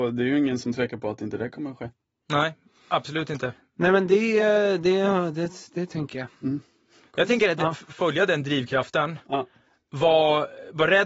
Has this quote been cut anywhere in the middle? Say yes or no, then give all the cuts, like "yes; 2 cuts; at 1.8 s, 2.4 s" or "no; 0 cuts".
no; 0 cuts